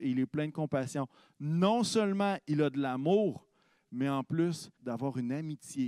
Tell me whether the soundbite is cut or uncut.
cut